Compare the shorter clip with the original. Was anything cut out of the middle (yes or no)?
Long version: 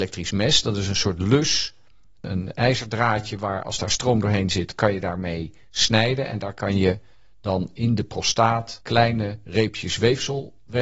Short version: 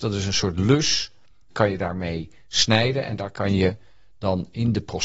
yes